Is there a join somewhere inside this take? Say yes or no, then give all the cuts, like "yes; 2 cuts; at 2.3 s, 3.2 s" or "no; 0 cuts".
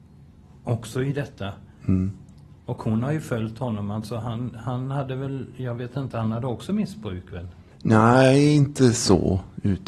no; 0 cuts